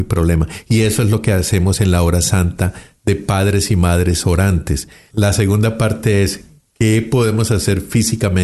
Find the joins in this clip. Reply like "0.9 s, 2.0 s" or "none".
5.1 s